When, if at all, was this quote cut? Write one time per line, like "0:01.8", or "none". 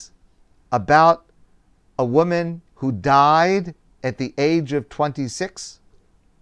0:02.7

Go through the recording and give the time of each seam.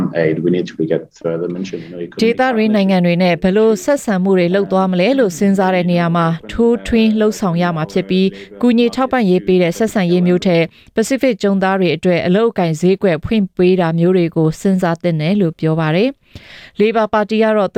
none

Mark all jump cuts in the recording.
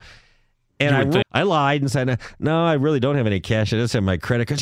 0:01.2

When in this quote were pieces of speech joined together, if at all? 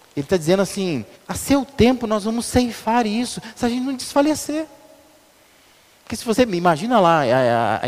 0:01.1

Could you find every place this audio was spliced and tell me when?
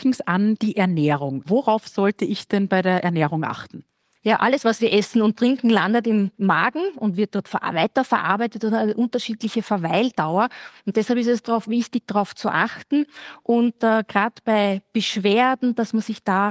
none

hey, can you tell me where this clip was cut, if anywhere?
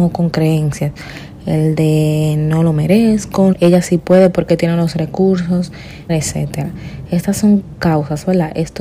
0:03.5
0:06.1

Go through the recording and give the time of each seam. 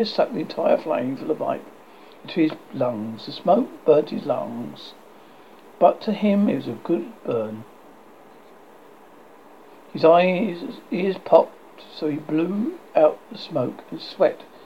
none

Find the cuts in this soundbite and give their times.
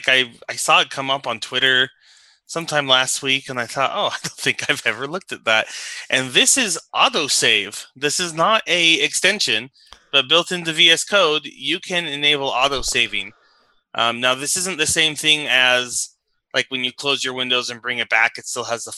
none

